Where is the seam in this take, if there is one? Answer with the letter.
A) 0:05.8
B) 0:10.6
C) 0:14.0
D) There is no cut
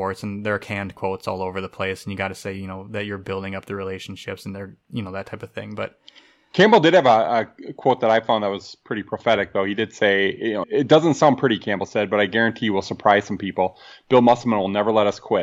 B